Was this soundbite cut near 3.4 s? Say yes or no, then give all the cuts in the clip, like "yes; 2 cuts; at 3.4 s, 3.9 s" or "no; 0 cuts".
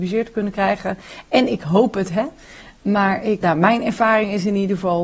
yes; 1 cut; at 3.4 s